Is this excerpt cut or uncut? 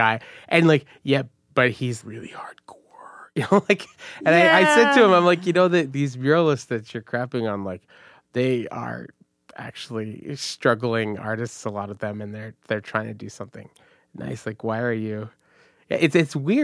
cut